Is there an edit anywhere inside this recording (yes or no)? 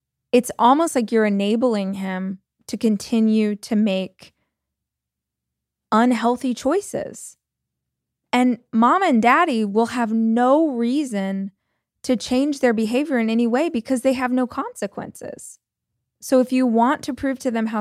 yes